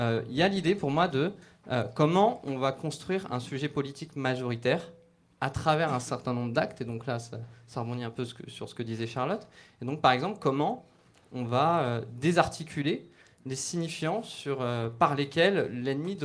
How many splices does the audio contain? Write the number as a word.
zero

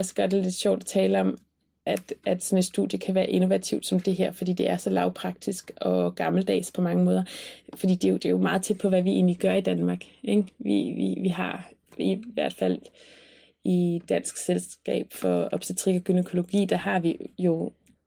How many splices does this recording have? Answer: one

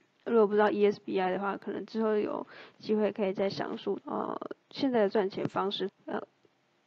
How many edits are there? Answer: two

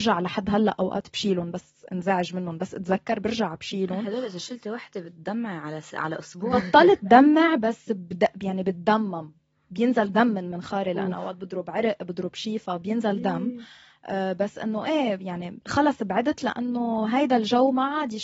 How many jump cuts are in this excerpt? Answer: one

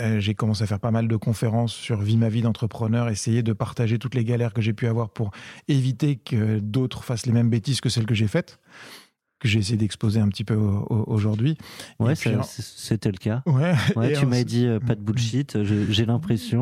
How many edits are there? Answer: zero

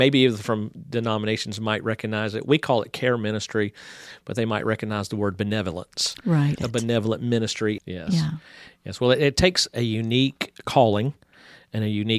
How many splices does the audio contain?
two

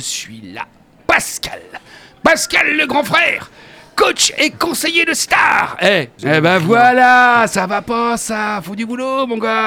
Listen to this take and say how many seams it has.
one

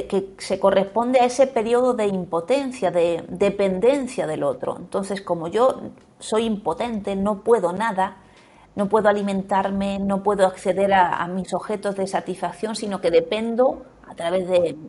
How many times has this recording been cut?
zero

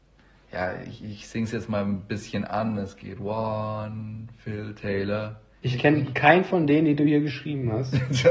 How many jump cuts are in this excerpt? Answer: one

